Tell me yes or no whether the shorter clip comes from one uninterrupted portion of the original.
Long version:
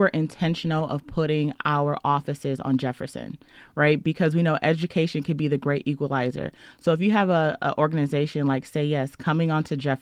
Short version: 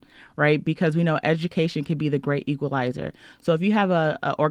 yes